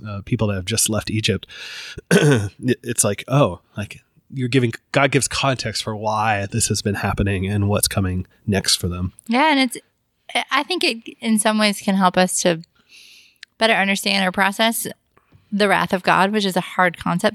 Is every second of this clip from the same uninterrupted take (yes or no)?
yes